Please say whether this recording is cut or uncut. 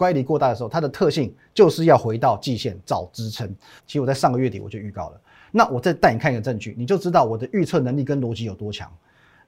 cut